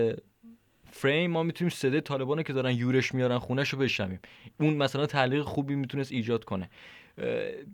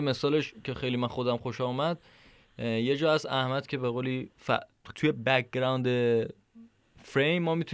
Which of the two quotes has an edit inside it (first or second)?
second